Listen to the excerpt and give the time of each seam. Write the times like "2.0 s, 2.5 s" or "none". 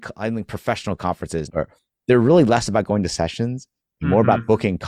1.5 s